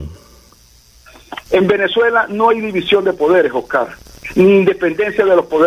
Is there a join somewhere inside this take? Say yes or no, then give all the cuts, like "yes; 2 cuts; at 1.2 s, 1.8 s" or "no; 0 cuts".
yes; 1 cut; at 1.5 s